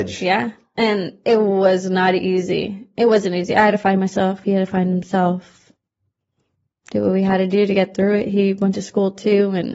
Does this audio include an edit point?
no; 0 cuts

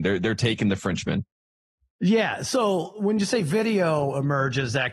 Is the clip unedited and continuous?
yes; 0 cuts

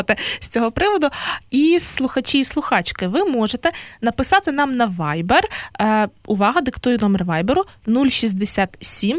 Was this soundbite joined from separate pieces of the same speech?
no; 0 cuts

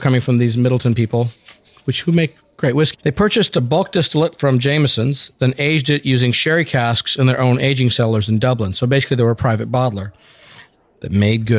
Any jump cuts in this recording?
yes; 1 cut; at 2.9 s

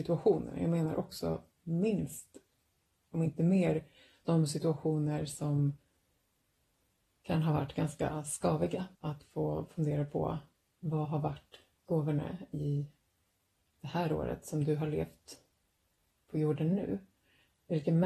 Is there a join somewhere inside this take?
yes; 1 cut; at 8.9 s

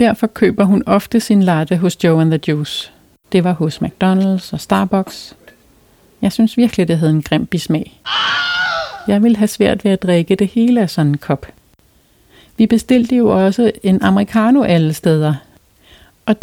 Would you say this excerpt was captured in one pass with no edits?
no; 1 cut; at 3.3 s

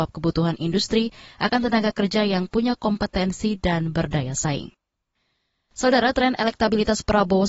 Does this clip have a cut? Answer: no; 0 cuts

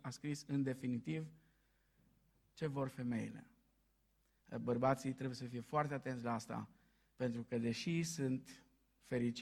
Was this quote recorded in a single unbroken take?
yes; 0 cuts

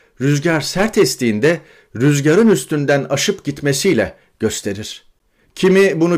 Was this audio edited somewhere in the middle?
no; 0 cuts

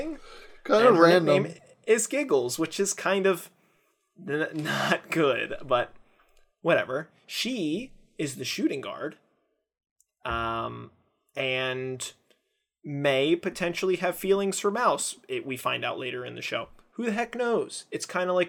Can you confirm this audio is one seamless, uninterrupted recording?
yes; 0 cuts

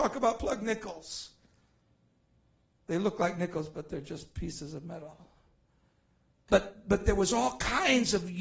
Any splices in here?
yes; 2 cuts; at 2.8 s, 6.5 s

